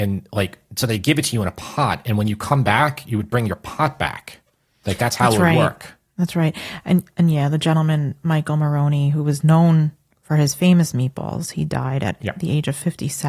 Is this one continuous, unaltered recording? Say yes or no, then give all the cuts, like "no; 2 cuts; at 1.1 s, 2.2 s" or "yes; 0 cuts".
yes; 0 cuts